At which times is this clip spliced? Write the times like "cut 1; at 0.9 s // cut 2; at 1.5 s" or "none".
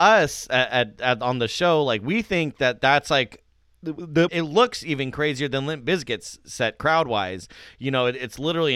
cut 1; at 4.3 s

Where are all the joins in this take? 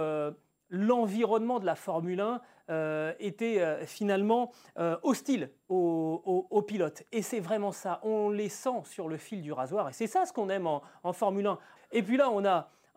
cut 1; at 11.8 s

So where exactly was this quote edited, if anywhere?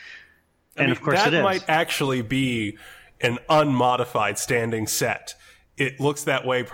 none

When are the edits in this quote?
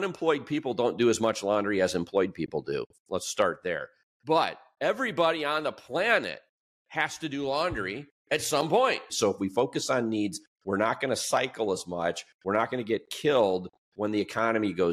cut 1; at 9.1 s // cut 2; at 10.5 s

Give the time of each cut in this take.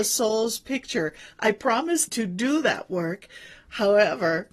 cut 1; at 2.1 s

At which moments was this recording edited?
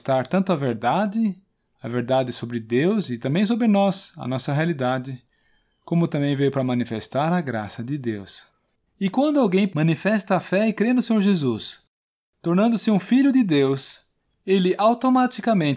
cut 1; at 8.9 s

